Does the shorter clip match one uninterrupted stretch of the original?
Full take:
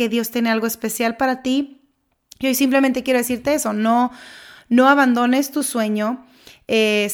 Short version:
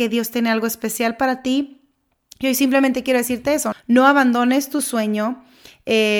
no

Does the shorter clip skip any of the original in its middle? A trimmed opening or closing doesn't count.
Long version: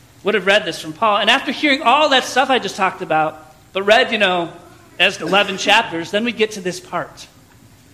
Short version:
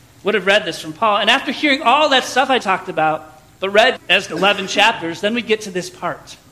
yes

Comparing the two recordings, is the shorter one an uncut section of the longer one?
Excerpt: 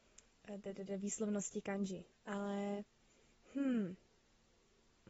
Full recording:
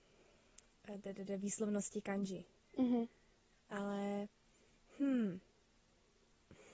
no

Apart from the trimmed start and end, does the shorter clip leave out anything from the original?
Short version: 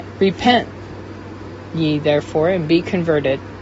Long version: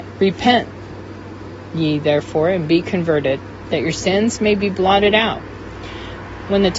no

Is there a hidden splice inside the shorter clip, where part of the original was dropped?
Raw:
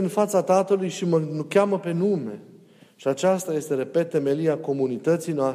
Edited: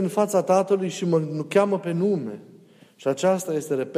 no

